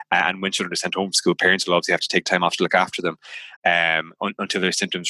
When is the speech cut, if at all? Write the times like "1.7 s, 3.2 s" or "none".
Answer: 3.6 s